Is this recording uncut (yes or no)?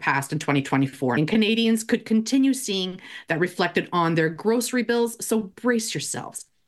no